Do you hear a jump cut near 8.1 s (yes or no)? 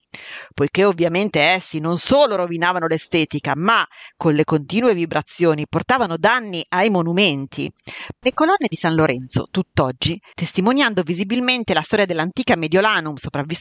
yes